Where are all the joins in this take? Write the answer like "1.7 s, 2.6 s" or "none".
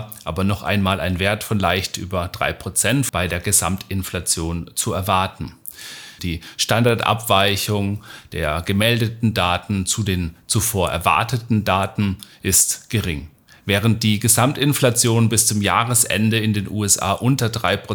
3.1 s, 6.2 s